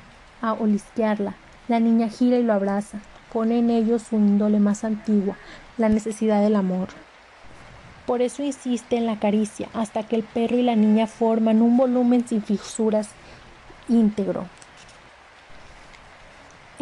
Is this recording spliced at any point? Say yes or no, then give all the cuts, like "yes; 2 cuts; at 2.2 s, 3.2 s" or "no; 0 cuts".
yes; 2 cuts; at 3.2 s, 5.7 s